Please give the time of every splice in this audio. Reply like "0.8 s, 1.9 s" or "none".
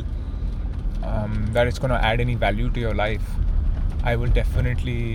none